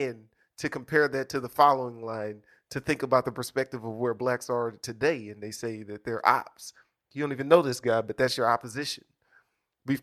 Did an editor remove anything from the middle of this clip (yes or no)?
no